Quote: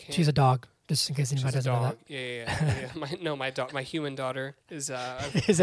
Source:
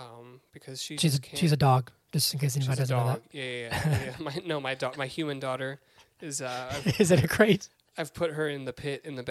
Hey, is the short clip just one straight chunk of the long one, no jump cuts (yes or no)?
no